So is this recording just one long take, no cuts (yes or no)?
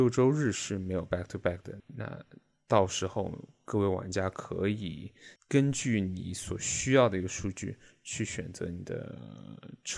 no